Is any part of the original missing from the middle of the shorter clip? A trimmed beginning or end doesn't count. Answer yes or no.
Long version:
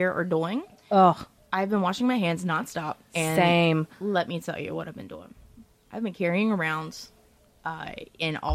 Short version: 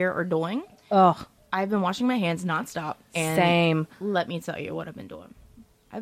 no